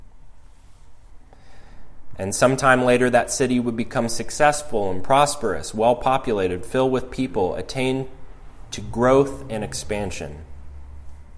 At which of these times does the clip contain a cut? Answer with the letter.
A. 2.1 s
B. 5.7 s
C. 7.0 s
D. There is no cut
A